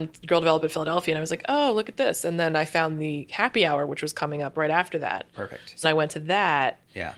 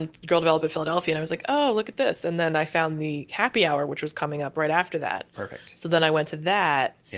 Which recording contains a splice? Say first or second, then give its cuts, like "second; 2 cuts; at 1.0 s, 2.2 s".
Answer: first; 1 cut; at 5.8 s